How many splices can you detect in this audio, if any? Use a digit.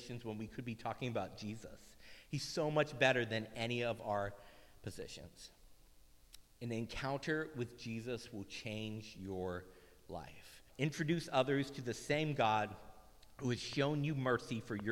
2